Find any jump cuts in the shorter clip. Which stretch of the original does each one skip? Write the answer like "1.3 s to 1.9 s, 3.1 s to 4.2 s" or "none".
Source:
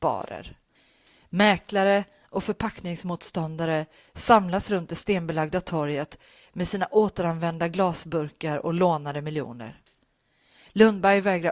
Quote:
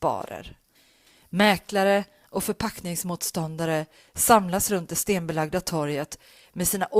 none